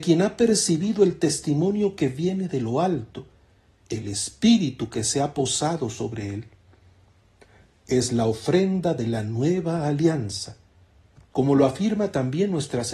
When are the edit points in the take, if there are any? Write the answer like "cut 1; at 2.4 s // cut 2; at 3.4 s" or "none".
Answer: none